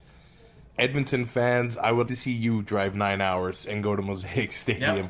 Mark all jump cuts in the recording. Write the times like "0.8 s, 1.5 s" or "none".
2.1 s